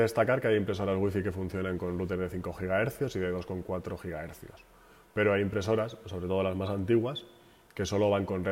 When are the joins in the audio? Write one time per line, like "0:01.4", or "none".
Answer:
none